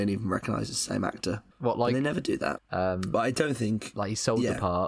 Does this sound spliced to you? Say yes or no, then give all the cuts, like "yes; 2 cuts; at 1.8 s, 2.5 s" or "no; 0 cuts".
yes; 2 cuts; at 1.5 s, 2.6 s